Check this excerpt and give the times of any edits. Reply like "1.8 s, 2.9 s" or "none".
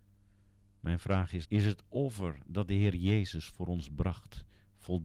1.4 s